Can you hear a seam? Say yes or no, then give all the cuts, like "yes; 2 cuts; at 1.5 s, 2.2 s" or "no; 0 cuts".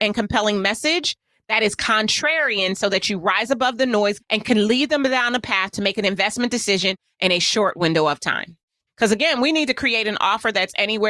yes; 2 cuts; at 4.2 s, 8.9 s